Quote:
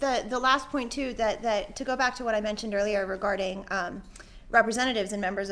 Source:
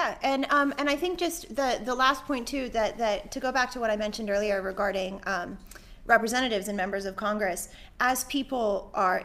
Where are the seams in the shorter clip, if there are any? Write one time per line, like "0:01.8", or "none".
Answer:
none